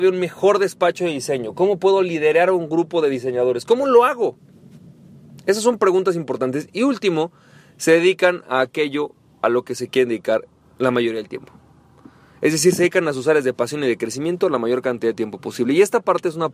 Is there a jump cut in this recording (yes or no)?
no